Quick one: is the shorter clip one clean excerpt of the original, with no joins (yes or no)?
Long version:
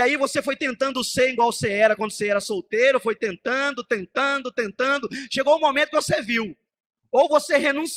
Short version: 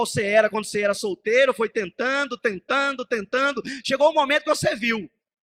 yes